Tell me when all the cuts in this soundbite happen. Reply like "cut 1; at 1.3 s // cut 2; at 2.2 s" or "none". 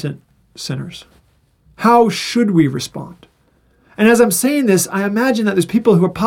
cut 1; at 1.6 s